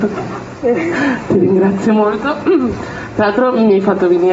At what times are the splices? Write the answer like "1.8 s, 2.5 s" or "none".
none

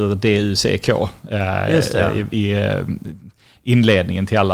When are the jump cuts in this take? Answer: none

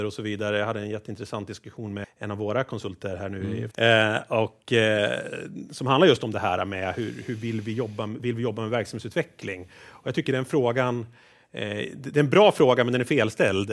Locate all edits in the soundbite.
2.0 s, 3.7 s

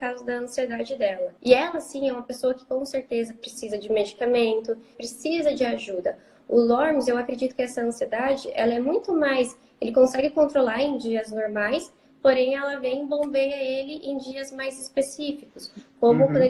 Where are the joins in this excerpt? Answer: 4.9 s

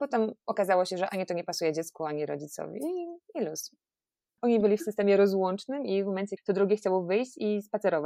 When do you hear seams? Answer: 4.4 s, 6.4 s

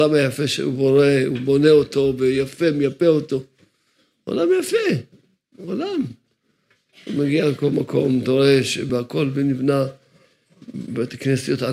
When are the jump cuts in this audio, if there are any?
8.9 s

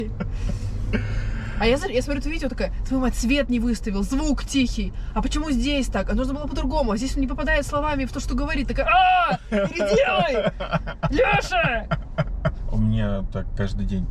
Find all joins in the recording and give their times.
12.6 s

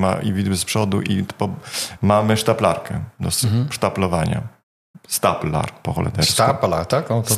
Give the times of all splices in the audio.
2.0 s

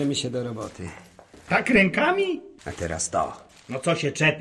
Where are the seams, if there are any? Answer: 1.5 s, 2.6 s

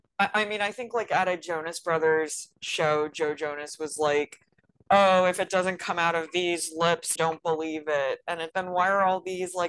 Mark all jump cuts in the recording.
7.2 s, 8.5 s

